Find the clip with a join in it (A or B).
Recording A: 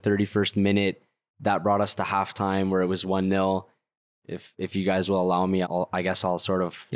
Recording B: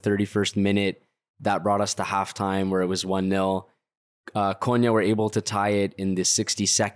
A